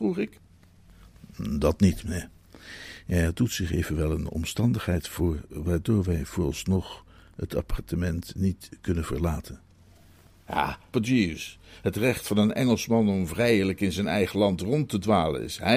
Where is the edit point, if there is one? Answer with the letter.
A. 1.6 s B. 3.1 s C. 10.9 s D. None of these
C